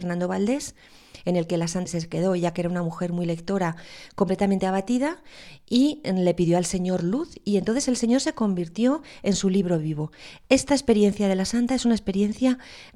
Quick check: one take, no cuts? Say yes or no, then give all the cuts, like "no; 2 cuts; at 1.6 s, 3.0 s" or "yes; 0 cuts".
no; 1 cut; at 1.9 s